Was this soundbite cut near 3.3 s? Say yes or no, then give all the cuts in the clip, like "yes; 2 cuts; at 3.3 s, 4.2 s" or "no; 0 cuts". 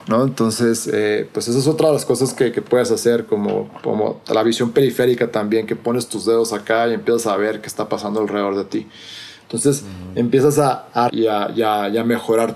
no; 2 cuts; at 9.4 s, 11.1 s